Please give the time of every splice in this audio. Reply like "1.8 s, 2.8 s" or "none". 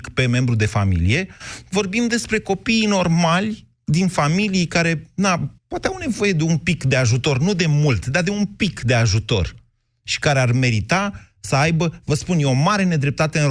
5.6 s